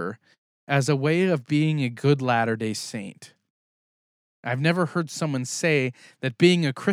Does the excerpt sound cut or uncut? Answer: uncut